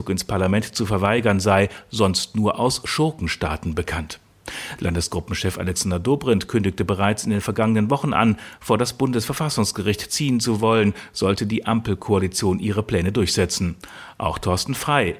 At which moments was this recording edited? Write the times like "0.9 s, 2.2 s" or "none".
none

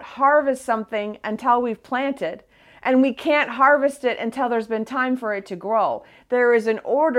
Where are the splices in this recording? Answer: none

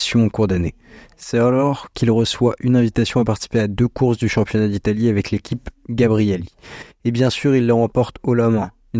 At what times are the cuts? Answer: none

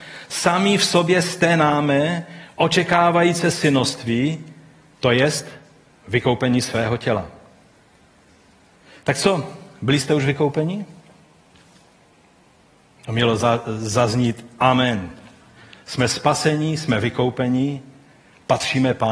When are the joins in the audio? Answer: none

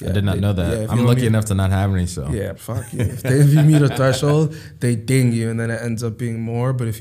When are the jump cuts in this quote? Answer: 2.6 s

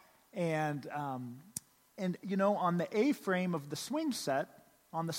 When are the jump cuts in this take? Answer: none

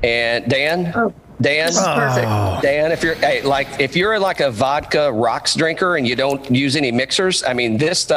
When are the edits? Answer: none

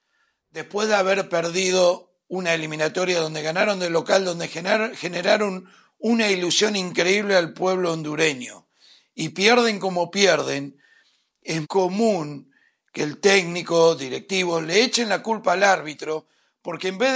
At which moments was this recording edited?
11.6 s

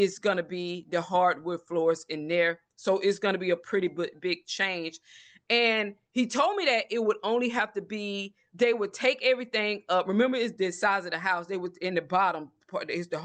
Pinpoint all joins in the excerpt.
none

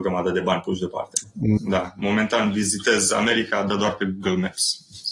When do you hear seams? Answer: 1.6 s

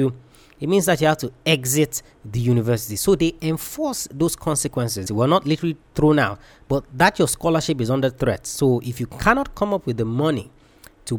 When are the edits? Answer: 5.1 s

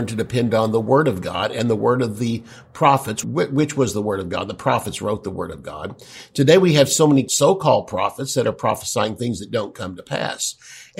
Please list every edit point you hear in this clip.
3.2 s

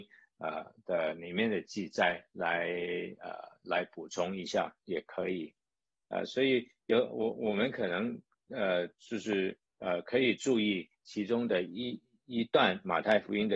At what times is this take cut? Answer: 6.0 s

